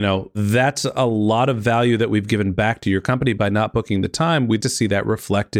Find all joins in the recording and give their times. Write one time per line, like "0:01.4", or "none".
0:04.6